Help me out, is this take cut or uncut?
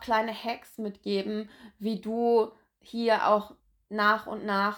uncut